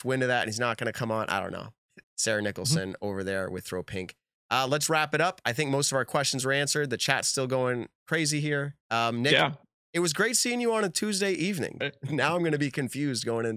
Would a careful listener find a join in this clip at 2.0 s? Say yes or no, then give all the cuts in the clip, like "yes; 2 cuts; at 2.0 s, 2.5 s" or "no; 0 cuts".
yes; 3 cuts; at 2.0 s, 8.8 s, 11.8 s